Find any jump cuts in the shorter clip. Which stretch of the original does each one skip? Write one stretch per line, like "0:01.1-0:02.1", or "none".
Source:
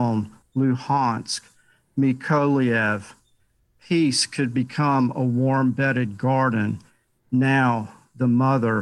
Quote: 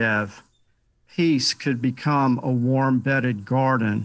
none

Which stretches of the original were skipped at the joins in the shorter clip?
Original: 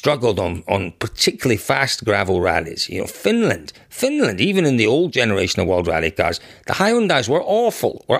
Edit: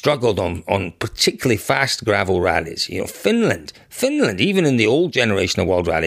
none

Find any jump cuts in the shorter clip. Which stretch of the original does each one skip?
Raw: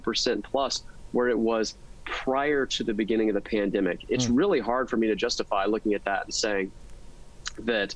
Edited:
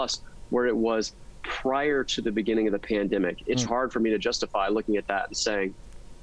0:04.3-0:04.6

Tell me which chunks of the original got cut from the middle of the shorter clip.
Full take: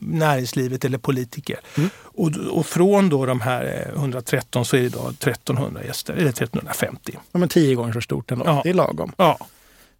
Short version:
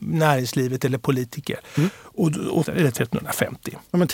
0:02.6-0:06.1

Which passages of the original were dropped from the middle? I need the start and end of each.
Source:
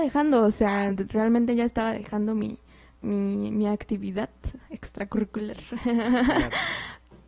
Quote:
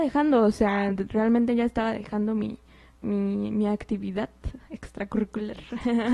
none

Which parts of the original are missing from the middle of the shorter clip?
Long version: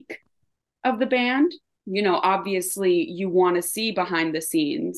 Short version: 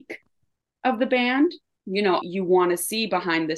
0:02.2-0:03.1

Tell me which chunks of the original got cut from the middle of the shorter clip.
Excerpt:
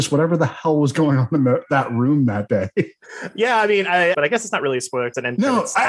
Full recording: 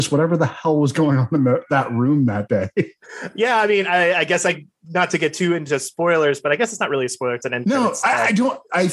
0:04.1-0:06.4

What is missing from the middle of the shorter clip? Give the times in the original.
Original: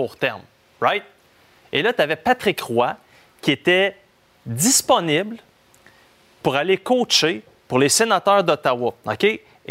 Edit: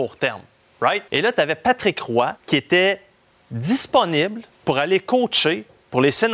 0:01.1-0:01.7
0:03.0-0:03.3
0:05.5-0:06.3

